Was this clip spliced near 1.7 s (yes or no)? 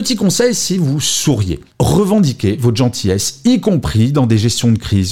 yes